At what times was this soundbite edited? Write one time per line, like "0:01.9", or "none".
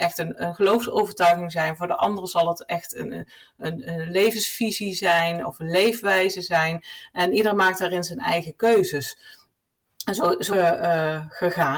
0:10.5